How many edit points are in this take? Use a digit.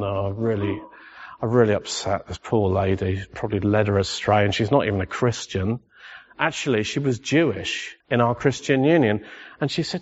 1